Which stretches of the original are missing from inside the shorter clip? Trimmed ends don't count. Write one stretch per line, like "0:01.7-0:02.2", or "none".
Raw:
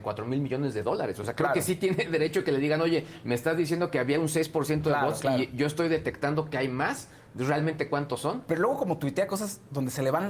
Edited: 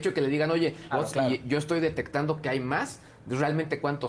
0:03.2-0:05.0

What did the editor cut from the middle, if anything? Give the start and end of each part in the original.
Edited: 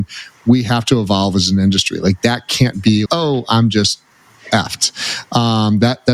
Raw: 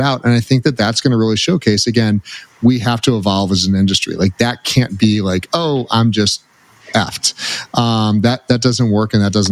0:05.2-0:05.5

